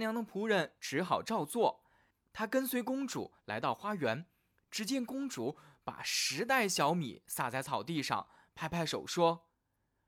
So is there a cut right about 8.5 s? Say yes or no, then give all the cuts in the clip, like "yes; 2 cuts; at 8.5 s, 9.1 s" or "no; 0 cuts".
no; 0 cuts